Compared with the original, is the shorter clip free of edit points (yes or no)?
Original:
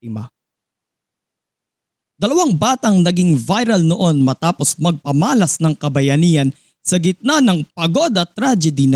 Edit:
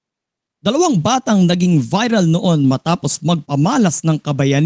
yes